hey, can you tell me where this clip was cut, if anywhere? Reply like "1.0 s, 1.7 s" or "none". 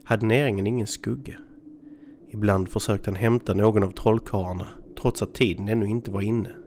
2.2 s